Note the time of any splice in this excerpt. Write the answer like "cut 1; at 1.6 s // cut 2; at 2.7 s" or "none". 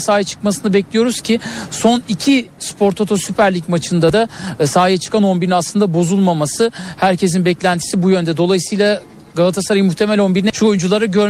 none